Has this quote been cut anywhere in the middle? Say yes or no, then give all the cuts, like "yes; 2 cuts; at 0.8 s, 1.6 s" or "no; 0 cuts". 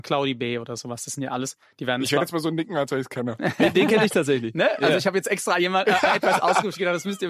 no; 0 cuts